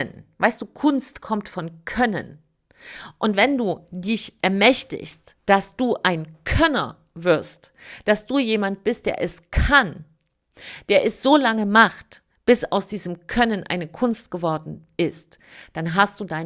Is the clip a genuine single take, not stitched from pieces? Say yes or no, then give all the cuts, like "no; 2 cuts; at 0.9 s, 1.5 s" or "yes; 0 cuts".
yes; 0 cuts